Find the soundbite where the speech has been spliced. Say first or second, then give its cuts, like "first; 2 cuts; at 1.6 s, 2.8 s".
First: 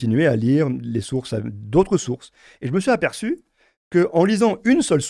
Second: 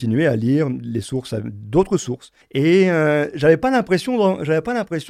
second; 1 cut; at 2.4 s